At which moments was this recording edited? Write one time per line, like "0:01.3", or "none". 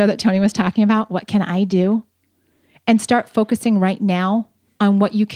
none